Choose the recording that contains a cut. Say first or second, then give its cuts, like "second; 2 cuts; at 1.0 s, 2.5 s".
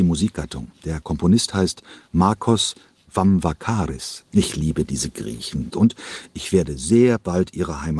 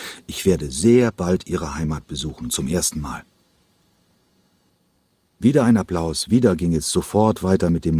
first; 2 cuts; at 4.2 s, 5.7 s